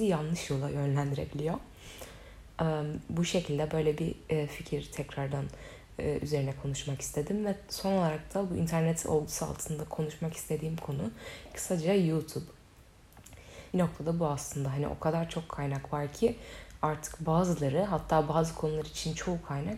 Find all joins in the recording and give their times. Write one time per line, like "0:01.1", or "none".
0:13.7

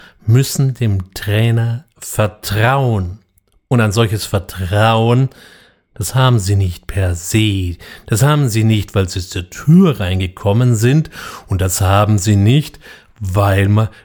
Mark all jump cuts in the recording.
none

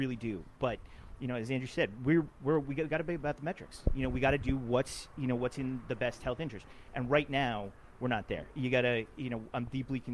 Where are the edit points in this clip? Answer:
none

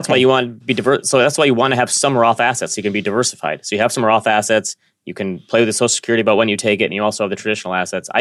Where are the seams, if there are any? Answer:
none

